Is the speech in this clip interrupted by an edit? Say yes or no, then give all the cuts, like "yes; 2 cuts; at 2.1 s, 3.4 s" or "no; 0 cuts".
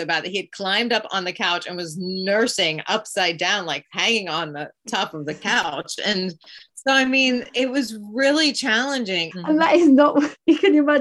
yes; 2 cuts; at 6.7 s, 9.3 s